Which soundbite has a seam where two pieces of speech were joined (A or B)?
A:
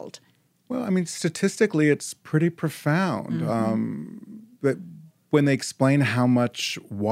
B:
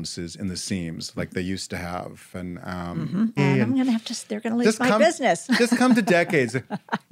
B